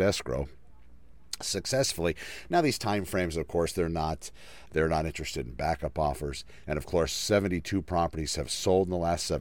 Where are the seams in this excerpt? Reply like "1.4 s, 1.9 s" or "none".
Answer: 4.7 s, 6.6 s